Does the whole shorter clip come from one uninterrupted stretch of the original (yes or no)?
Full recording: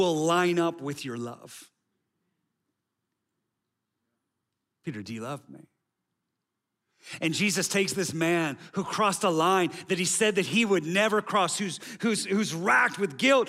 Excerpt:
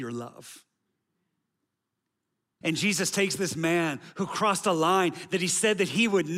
no